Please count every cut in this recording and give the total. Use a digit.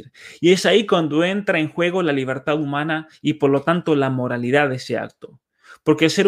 0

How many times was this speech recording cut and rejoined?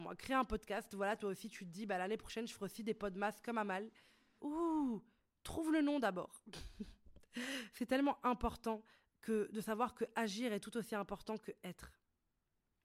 1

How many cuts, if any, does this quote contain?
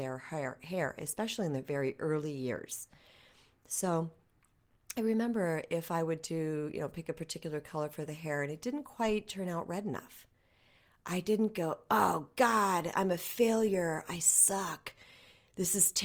0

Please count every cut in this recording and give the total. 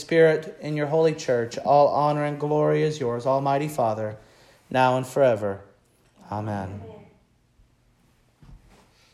0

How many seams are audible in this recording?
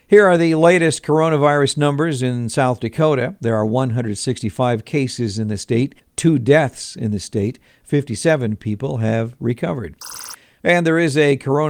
2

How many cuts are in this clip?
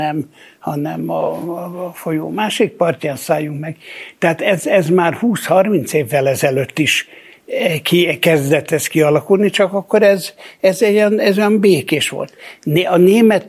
0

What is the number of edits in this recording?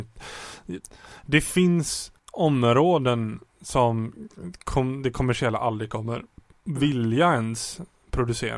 1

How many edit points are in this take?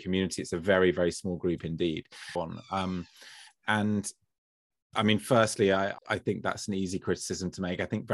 2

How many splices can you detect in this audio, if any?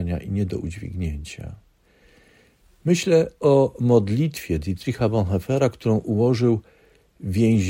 0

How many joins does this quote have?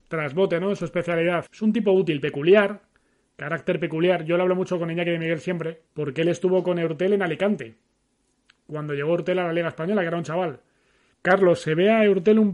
3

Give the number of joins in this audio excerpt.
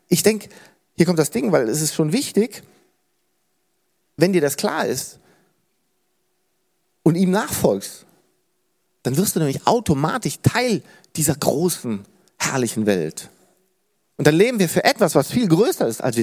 0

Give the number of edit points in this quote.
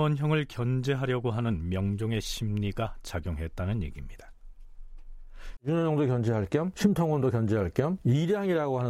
1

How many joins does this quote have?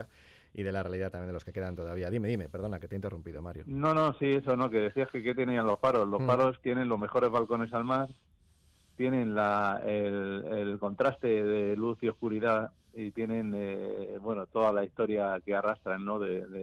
1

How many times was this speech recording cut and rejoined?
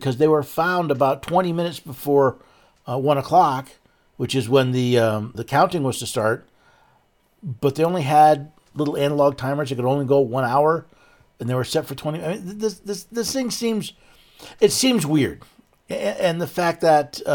1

